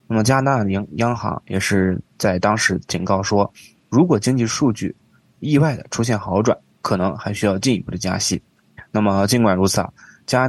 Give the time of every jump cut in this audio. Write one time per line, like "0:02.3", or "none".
none